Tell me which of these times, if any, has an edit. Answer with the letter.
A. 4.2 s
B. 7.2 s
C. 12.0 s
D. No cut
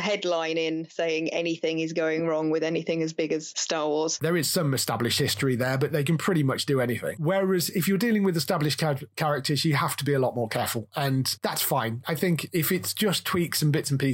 A